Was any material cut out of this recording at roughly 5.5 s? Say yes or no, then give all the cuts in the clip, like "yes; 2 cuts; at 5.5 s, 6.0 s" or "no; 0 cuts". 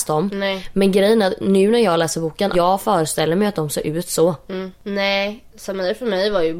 no; 1 cut; at 2.5 s